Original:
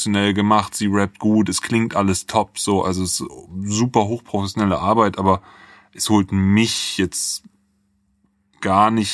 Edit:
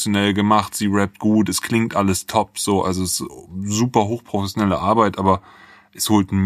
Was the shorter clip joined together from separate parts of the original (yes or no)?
no